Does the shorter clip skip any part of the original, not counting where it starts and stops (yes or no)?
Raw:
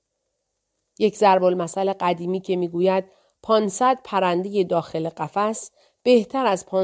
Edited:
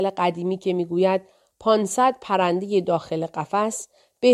no